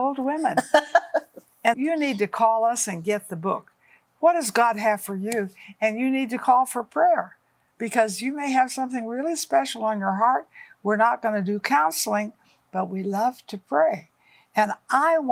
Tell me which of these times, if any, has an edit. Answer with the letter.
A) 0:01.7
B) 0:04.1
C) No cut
A